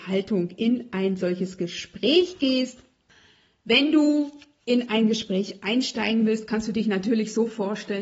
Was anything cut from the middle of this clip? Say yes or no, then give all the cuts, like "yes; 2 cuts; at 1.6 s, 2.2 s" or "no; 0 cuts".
no; 0 cuts